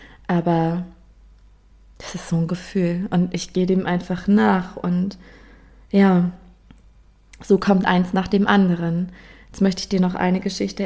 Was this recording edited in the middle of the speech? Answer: no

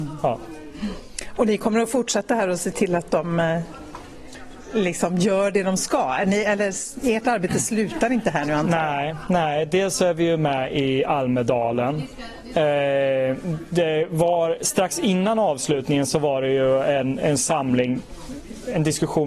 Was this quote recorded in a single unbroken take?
yes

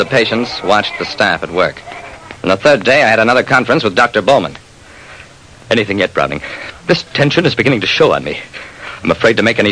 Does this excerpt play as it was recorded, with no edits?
yes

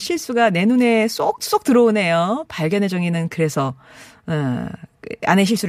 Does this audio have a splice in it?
no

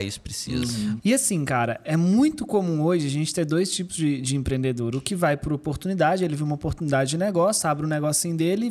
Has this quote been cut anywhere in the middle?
yes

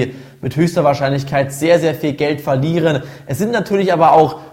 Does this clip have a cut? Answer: no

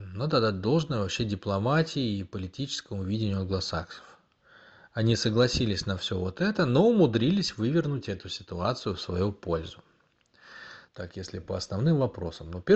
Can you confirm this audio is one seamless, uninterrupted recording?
no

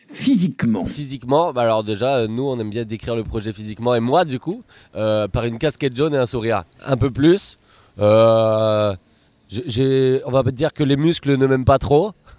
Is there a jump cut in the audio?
yes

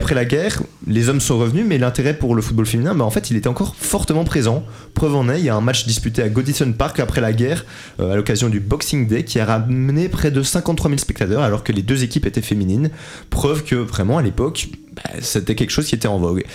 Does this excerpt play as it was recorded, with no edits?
yes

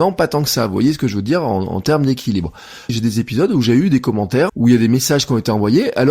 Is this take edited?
yes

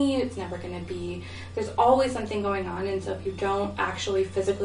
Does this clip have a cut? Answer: no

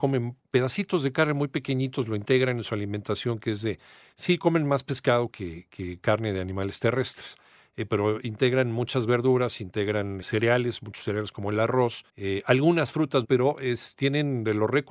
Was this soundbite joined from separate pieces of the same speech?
yes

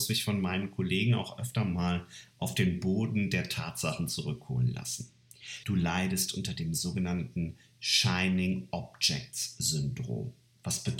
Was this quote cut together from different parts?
yes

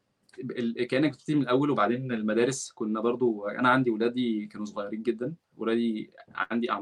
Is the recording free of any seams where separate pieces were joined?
yes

